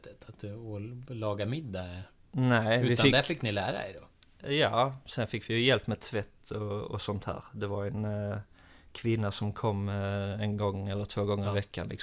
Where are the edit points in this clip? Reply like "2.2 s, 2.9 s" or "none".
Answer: none